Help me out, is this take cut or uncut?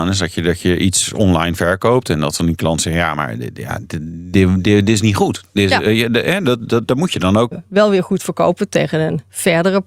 cut